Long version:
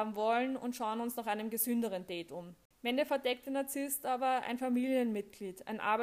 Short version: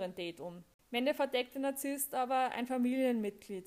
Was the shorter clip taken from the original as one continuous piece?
yes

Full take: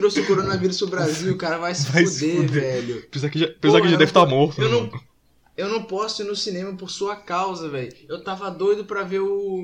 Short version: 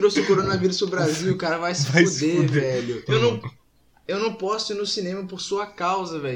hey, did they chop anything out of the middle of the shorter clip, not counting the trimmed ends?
yes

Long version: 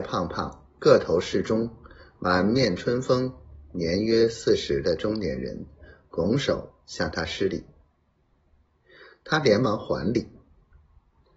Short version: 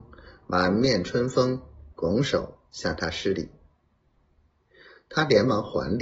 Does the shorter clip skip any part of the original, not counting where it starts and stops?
yes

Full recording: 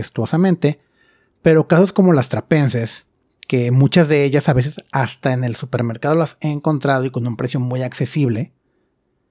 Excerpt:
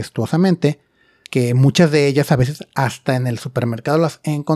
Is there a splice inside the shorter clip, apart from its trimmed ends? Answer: yes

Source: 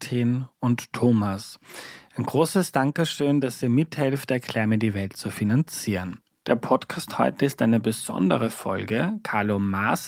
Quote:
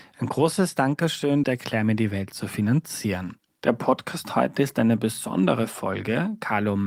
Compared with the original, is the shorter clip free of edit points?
no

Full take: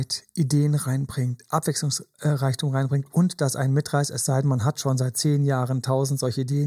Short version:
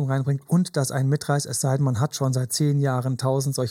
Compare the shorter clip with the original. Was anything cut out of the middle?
no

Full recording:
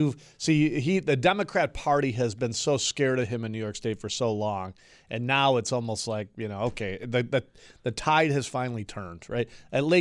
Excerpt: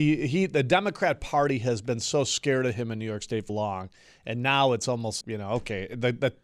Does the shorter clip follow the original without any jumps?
no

